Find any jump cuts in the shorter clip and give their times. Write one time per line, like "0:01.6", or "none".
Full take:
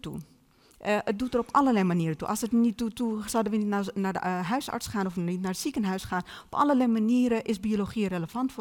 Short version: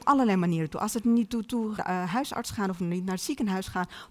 0:01.8